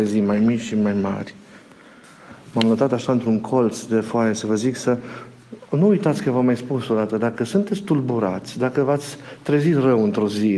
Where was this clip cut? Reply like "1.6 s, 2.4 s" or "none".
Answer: none